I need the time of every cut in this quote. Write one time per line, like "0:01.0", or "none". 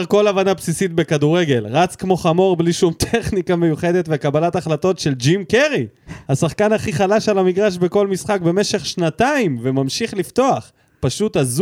0:06.2

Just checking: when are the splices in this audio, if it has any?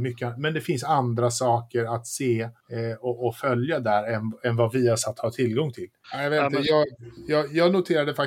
0:02.6
0:06.0

